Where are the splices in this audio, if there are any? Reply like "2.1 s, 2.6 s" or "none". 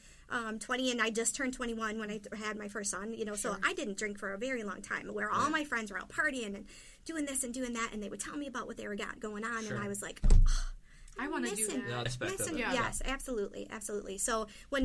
12.1 s